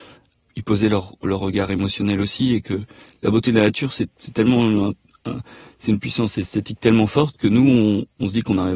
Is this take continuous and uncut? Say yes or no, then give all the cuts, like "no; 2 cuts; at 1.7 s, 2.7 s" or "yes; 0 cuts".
yes; 0 cuts